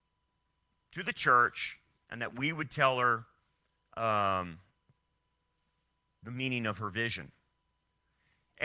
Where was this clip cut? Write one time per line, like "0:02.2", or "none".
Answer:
none